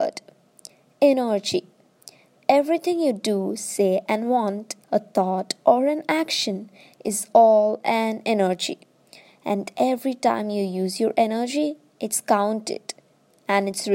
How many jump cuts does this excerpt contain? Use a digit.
1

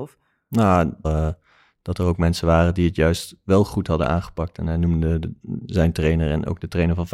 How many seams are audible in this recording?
1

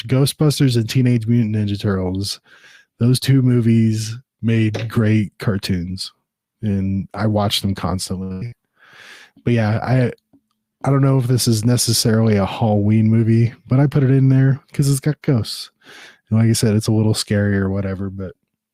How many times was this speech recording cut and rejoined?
0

